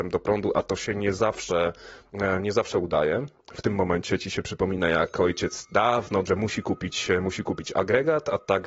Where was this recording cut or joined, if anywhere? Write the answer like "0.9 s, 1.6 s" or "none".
6.3 s